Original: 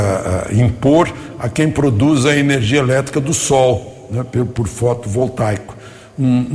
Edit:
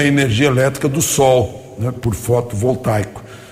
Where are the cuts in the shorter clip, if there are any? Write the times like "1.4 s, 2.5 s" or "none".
1.9 s